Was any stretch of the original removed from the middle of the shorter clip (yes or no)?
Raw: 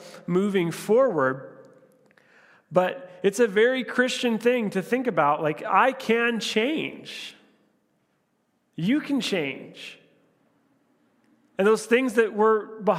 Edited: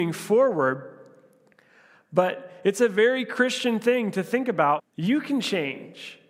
yes